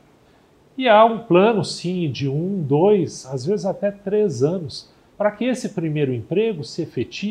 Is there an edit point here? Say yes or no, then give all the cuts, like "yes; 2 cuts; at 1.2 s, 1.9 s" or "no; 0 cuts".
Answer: no; 0 cuts